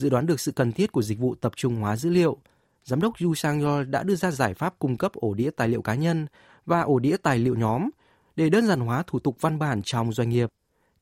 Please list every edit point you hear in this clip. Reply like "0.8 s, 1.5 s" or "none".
none

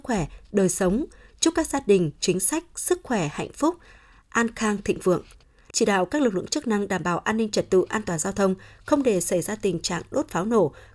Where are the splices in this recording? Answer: 5.7 s

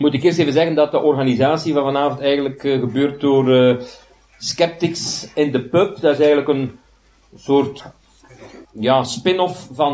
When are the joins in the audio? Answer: 8.6 s

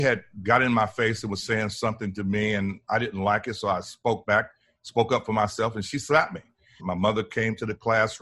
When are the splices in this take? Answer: 6.8 s

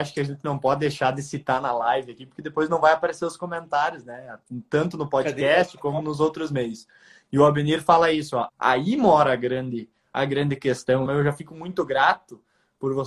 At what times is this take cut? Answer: 8.5 s, 11.1 s

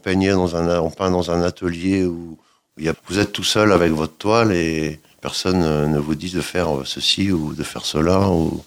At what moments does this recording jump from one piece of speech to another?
2.9 s

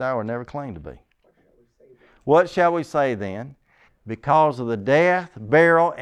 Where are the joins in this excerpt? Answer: 3.9 s

